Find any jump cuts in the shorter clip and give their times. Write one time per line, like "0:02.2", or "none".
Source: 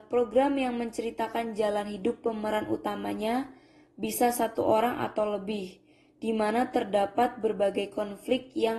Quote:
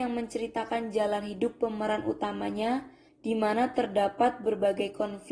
0:03.1